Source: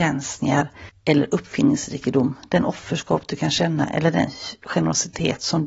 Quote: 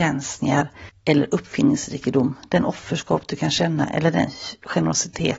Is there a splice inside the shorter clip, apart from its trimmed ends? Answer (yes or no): no